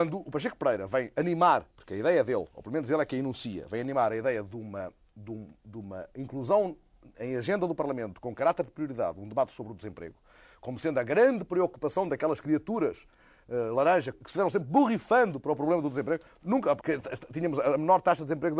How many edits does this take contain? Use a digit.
2